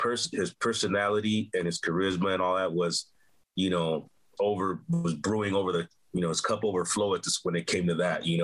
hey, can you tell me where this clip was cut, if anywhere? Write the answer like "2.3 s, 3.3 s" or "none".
4.4 s